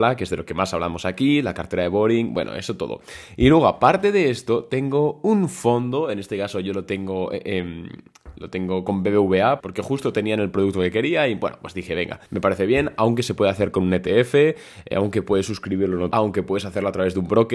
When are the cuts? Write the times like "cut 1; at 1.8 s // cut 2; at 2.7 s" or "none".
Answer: cut 1; at 9.6 s // cut 2; at 12.3 s // cut 3; at 16.1 s